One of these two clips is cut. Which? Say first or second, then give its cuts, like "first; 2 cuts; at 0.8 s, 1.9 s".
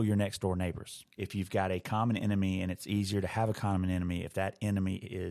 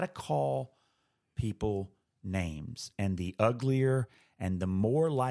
first; 1 cut; at 1.2 s